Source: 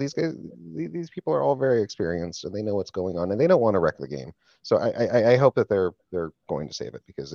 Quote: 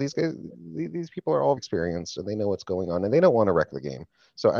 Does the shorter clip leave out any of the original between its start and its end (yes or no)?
yes